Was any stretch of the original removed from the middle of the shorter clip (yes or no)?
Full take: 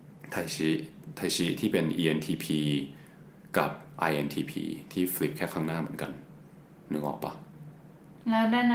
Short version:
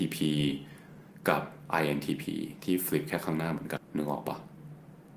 yes